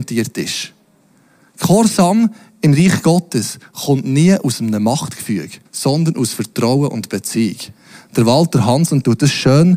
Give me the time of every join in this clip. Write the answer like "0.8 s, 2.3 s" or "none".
5.6 s